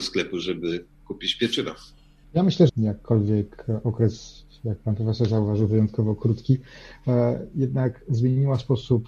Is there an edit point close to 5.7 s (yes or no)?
no